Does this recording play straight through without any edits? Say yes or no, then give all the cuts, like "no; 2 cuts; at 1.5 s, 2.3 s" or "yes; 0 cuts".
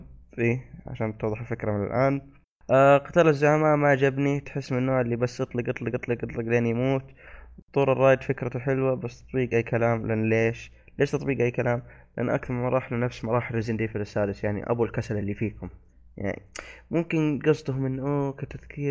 yes; 0 cuts